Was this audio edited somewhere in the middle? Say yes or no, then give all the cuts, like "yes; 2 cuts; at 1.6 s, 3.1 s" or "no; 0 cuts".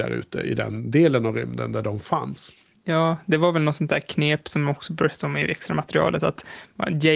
no; 0 cuts